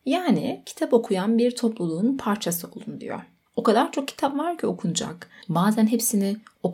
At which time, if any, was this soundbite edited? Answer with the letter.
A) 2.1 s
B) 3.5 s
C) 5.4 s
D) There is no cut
B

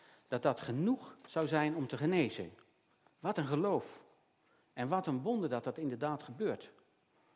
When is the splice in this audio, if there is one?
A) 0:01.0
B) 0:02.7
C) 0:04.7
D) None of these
D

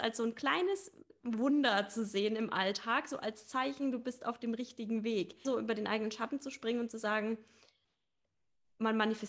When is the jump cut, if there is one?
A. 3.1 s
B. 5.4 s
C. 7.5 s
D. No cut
B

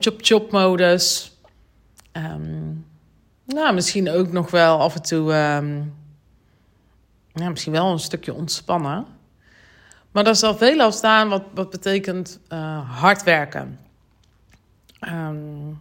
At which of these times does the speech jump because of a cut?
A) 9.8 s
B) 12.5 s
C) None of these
C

